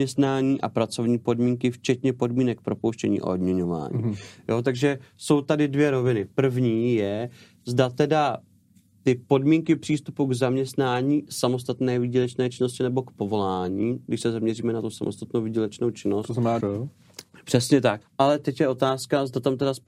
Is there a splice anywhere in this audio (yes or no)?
yes